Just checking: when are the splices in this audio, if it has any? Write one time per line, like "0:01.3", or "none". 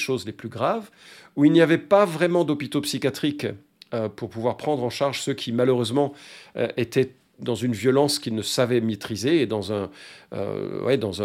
none